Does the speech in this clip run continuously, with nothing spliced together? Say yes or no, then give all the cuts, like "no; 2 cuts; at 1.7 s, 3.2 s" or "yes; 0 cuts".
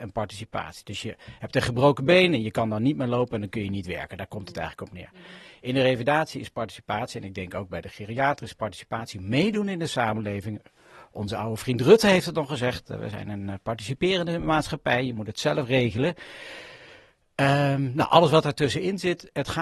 yes; 0 cuts